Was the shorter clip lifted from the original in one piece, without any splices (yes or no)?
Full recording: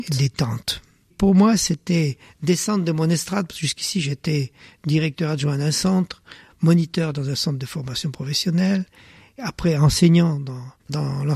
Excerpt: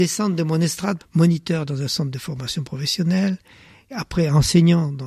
no